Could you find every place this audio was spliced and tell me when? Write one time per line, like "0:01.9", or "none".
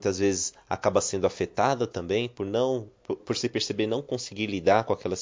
0:03.2